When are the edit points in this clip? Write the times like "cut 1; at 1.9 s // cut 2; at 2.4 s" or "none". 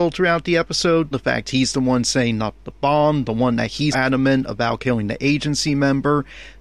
cut 1; at 1.1 s // cut 2; at 3.9 s